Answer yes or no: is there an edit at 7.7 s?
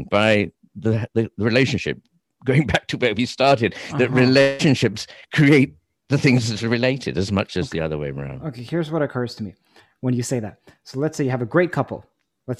no